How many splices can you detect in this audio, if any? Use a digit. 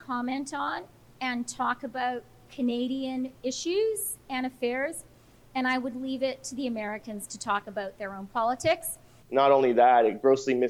1